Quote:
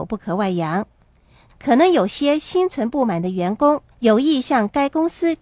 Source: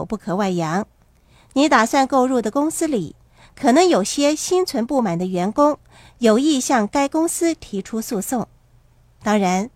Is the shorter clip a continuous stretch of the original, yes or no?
no